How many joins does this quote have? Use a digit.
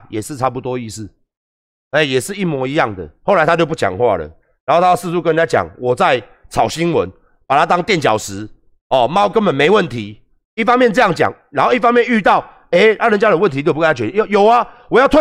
0